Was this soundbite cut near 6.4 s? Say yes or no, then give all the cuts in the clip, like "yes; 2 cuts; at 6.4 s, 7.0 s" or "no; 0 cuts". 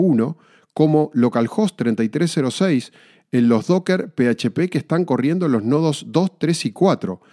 no; 0 cuts